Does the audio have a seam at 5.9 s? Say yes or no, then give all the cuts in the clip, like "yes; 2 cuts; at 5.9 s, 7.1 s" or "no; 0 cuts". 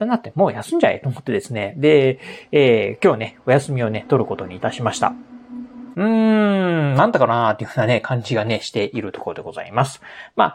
yes; 1 cut; at 5.9 s